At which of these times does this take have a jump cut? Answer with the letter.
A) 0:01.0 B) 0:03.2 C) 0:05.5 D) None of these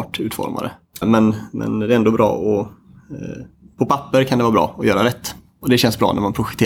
A